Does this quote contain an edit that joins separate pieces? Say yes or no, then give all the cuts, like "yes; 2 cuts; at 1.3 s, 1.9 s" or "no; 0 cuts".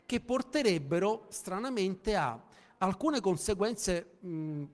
no; 0 cuts